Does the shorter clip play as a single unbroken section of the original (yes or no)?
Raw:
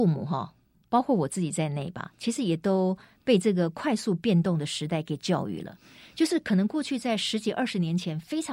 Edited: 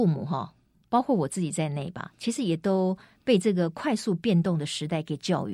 yes